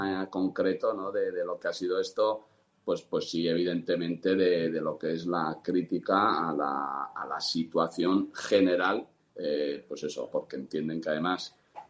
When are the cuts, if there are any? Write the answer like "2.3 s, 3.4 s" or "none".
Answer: 9.3 s, 10.3 s

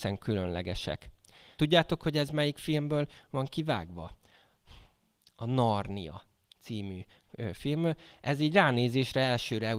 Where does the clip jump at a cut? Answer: 1.6 s

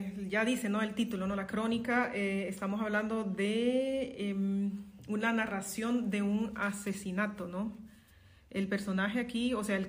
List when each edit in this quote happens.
none

